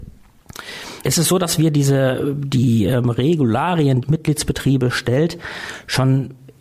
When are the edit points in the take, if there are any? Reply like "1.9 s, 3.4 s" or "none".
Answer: 1.0 s, 4.0 s